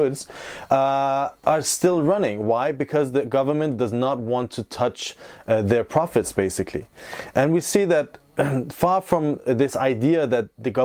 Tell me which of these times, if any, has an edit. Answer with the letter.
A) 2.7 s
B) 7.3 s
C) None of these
C